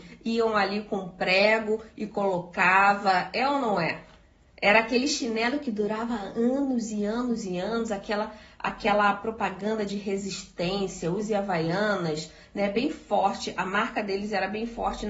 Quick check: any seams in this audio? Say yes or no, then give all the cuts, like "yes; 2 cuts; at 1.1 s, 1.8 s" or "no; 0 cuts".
no; 0 cuts